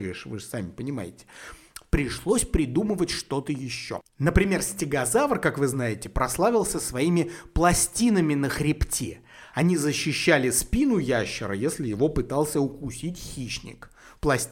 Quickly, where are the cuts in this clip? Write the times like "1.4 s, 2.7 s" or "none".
none